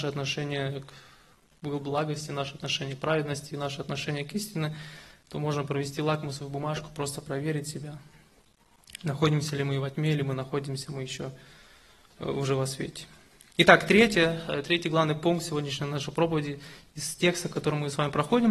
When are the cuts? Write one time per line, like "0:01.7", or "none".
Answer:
none